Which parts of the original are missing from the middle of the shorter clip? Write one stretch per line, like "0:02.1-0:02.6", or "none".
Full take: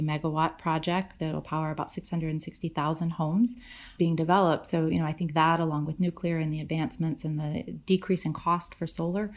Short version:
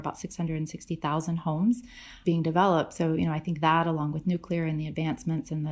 none